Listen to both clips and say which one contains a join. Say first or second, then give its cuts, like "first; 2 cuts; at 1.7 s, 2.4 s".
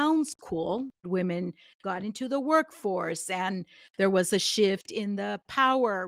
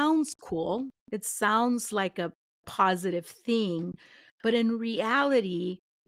first; 1 cut; at 1.0 s